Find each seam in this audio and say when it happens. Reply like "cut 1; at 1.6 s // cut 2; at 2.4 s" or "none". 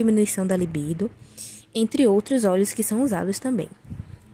none